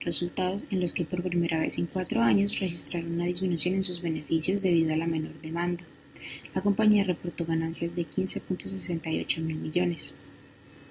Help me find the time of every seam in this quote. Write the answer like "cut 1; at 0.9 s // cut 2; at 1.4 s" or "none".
none